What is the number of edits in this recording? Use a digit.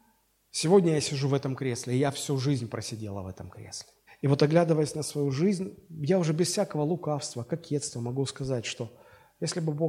2